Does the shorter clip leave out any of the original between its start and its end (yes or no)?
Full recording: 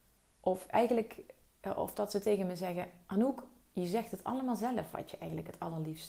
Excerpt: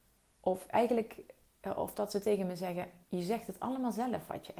yes